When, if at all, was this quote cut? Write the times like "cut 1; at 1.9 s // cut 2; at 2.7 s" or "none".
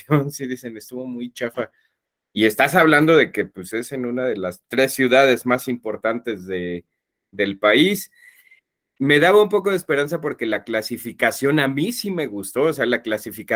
none